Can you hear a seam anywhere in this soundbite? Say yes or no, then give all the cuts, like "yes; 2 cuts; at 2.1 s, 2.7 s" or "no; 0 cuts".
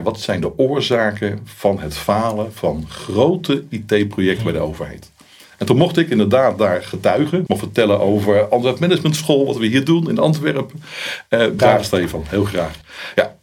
yes; 2 cuts; at 7.5 s, 11.6 s